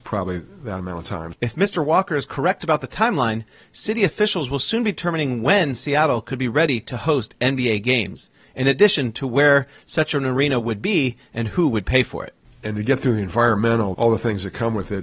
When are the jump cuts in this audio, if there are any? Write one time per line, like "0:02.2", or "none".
0:01.3
0:12.4
0:13.9

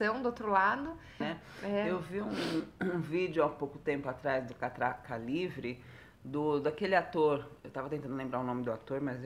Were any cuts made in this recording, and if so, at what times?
0:01.2

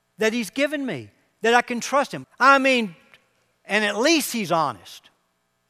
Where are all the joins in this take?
0:02.2

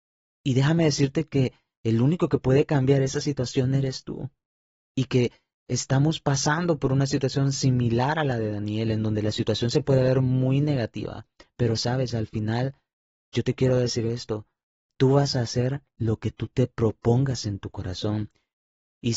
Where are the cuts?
none

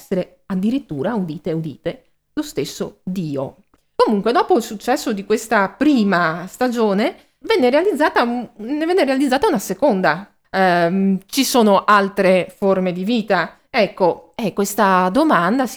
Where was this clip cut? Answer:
0:07.4
0:10.4

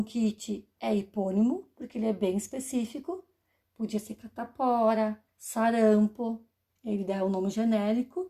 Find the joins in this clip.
0:05.3
0:06.7

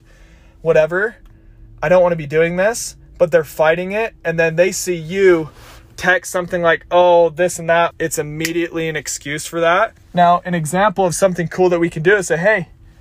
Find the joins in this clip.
0:07.9
0:10.0

